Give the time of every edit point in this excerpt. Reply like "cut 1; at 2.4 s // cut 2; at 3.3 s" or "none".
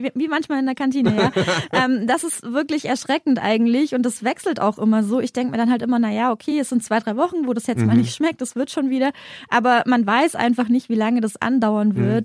none

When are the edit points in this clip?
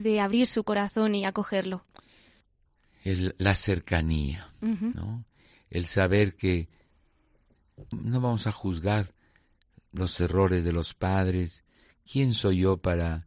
cut 1; at 7.9 s

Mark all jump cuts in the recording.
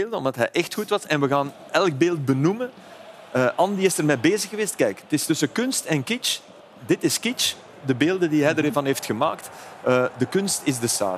cut 1; at 1.7 s

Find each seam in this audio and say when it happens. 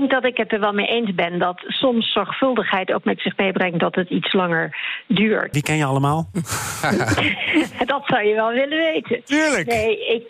cut 1; at 5.5 s

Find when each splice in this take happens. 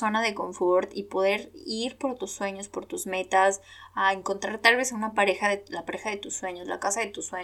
none

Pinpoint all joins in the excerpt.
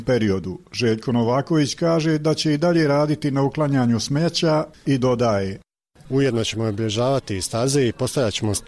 none

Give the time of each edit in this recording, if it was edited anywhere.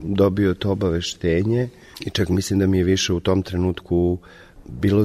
cut 1; at 1.9 s

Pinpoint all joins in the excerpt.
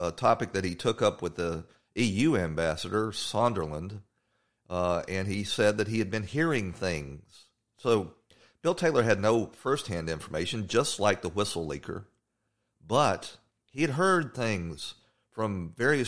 none

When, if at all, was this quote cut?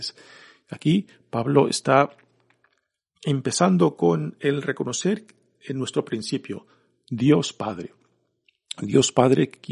none

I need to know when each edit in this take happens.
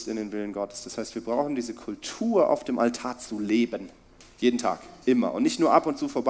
cut 1; at 5.0 s

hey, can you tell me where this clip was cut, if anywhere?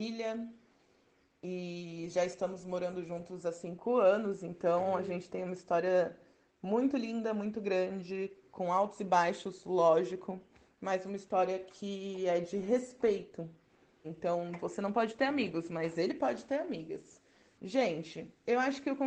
cut 1; at 14.0 s // cut 2; at 17.6 s

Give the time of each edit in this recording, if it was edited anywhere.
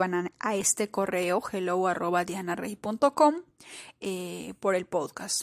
cut 1; at 4.0 s

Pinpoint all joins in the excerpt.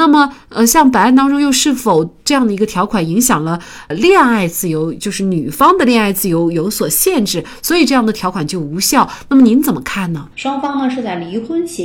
cut 1; at 10.3 s

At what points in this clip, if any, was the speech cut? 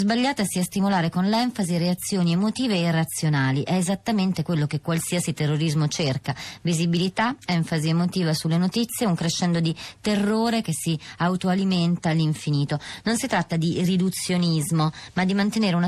none

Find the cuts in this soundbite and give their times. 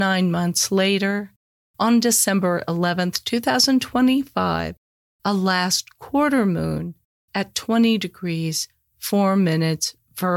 none

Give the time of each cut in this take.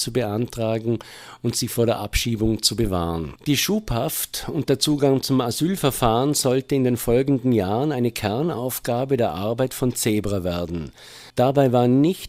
cut 1; at 3.4 s // cut 2; at 11.3 s

